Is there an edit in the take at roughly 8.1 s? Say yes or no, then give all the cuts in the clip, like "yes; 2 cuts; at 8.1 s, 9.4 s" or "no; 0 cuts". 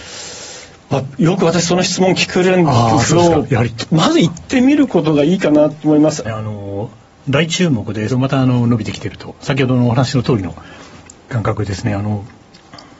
yes; 2 cuts; at 6.2 s, 8.1 s